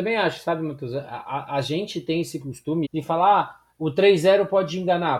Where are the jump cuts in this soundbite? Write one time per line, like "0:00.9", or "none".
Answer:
0:02.8